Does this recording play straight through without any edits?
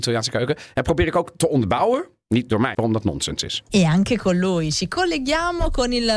no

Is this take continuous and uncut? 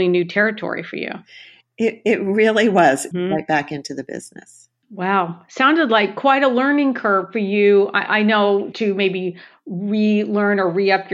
no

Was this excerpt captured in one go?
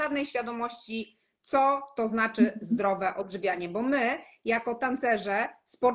yes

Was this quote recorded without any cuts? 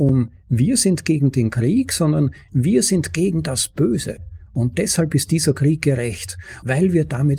no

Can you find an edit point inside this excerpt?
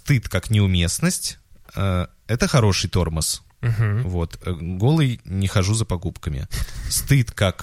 no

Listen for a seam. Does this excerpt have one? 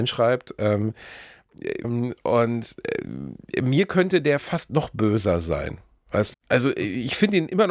yes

